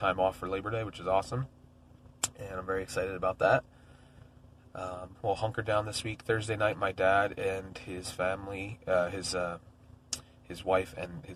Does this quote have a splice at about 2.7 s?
no; 1 cut; at 5.1 s

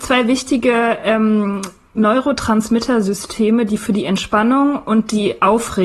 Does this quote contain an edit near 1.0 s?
no; 0 cuts

